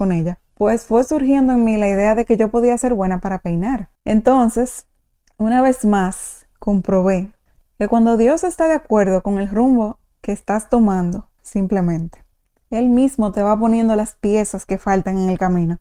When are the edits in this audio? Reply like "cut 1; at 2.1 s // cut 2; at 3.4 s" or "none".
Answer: cut 1; at 4.0 s // cut 2; at 11.4 s